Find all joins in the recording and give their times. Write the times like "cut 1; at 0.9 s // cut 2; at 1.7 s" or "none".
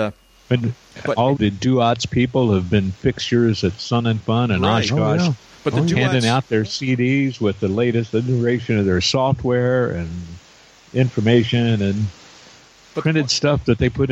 cut 1; at 1.4 s